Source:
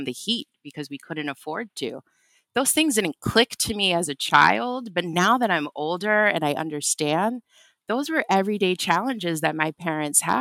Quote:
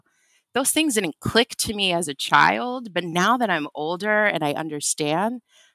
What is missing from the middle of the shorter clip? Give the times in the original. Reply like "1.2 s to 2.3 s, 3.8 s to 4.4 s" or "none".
none